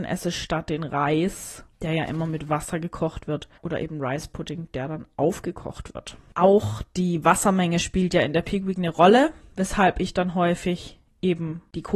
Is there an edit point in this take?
yes; 3 cuts; at 1.7 s, 3.6 s, 6.3 s

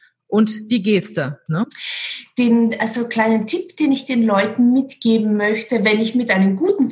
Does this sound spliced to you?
yes; 1 cut; at 1.5 s

